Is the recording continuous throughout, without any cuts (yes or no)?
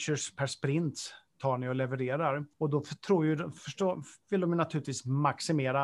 no